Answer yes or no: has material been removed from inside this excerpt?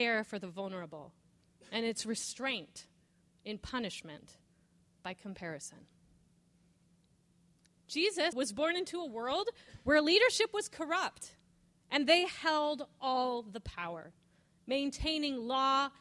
yes